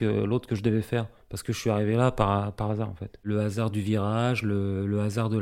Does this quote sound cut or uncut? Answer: uncut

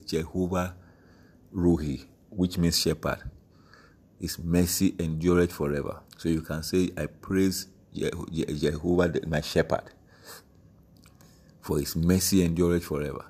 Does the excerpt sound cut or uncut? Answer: cut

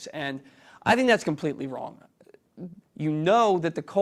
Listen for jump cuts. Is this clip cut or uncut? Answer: cut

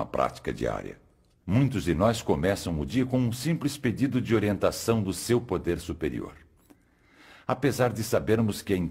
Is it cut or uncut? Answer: cut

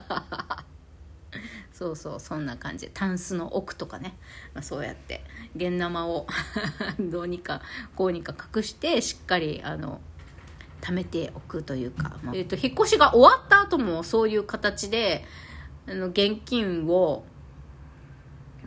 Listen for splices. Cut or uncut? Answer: cut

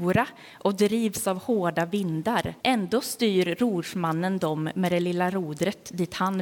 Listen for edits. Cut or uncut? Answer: cut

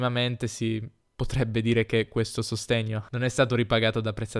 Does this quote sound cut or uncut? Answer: uncut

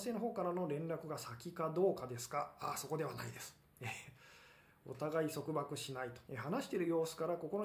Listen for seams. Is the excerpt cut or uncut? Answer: cut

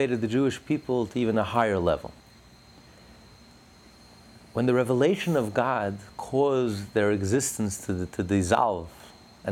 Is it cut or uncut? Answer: uncut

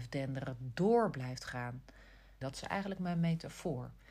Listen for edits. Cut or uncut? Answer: cut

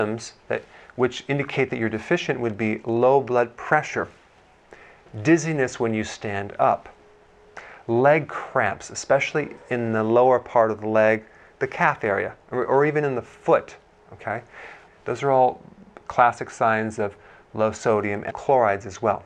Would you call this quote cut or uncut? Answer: cut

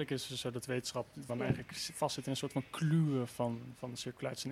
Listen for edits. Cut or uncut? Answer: cut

